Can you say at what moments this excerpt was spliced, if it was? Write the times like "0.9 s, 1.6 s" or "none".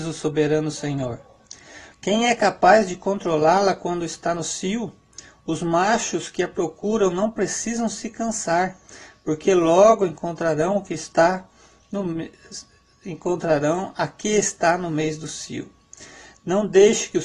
1.9 s